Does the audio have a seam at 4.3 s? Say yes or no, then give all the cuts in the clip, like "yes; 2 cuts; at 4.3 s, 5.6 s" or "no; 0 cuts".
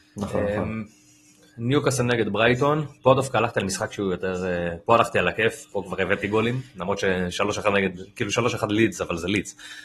no; 0 cuts